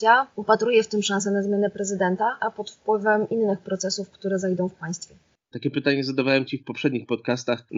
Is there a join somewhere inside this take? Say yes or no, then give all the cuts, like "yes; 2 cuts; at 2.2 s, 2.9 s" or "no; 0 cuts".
yes; 2 cuts; at 2.4 s, 5.5 s